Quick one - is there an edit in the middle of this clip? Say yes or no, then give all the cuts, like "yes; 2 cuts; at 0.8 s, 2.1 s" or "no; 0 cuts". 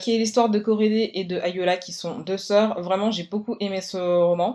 no; 0 cuts